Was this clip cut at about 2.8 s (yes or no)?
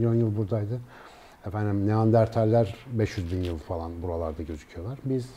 no